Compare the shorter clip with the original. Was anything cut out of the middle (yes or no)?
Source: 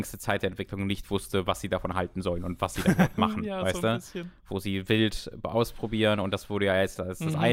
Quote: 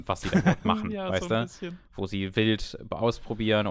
no